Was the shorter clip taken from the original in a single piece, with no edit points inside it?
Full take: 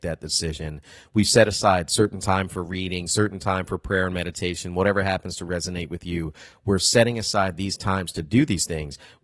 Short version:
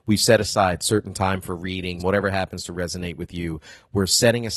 no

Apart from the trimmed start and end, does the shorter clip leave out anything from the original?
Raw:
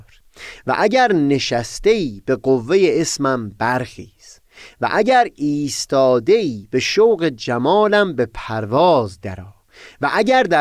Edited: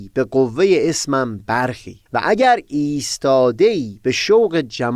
yes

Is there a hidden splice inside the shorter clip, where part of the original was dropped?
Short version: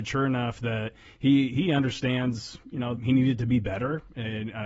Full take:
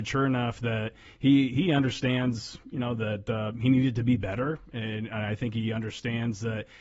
yes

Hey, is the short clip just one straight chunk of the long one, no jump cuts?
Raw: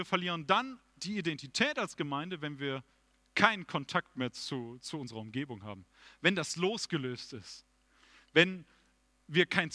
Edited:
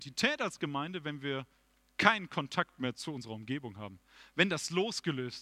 no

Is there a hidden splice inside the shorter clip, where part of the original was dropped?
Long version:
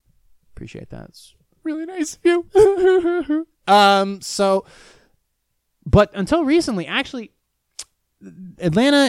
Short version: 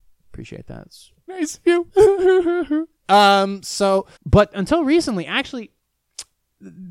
yes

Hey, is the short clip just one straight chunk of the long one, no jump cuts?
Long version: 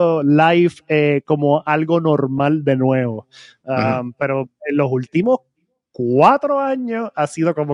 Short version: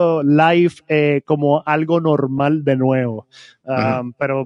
yes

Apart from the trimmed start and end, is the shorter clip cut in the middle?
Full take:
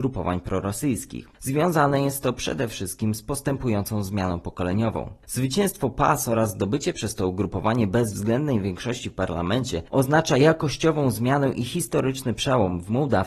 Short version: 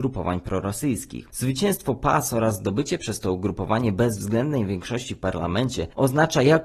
yes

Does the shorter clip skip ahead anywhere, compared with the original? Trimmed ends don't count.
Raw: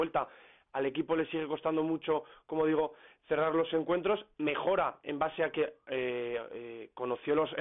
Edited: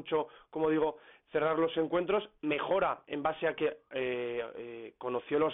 no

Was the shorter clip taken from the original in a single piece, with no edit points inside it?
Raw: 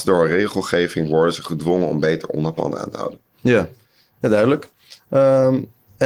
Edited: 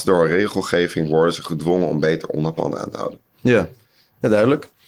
yes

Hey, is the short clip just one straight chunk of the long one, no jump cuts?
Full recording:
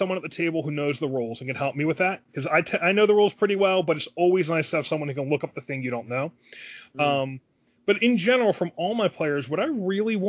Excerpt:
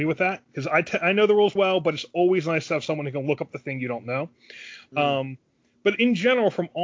no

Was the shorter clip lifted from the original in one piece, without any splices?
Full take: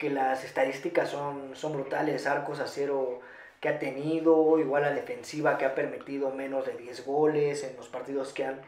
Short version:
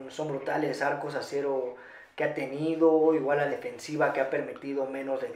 yes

